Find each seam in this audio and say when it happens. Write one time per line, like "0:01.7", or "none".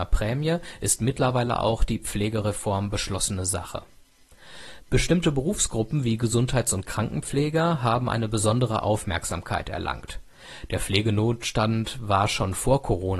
0:04.8

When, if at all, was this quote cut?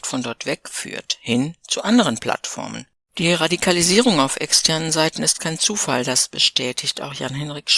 0:03.1

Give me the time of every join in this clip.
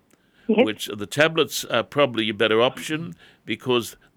none

